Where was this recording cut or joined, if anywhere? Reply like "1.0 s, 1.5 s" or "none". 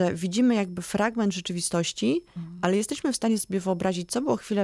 none